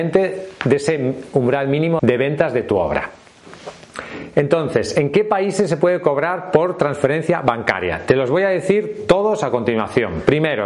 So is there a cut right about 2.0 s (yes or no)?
yes